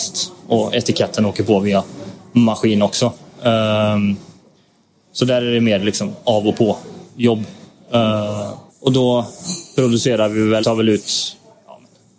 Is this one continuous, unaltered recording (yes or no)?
no